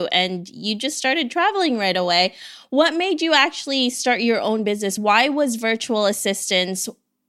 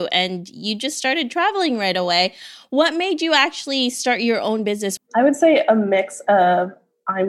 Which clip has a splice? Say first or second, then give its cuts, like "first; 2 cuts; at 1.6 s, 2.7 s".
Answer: second; 1 cut; at 5.0 s